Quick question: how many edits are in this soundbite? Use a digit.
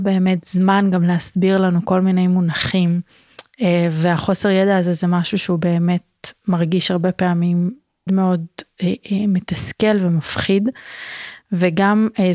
1